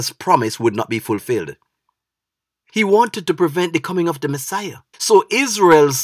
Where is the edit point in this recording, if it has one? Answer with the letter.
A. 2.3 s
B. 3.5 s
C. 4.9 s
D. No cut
C